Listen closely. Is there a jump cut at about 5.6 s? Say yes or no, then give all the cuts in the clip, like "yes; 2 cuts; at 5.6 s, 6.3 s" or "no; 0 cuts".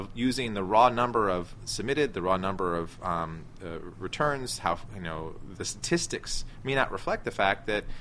yes; 1 cut; at 5.6 s